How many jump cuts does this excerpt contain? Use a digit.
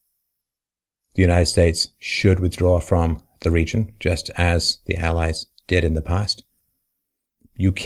1